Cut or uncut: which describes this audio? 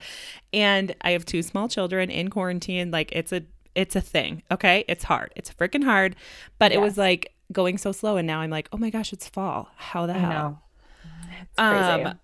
uncut